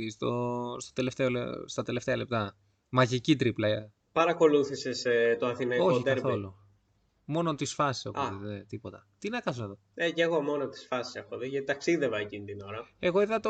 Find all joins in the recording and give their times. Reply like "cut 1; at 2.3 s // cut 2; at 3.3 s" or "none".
none